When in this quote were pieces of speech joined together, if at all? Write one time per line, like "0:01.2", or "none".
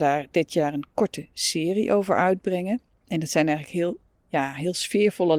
0:03.0